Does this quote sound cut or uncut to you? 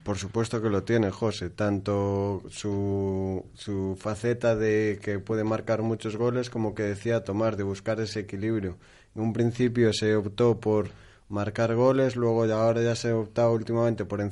uncut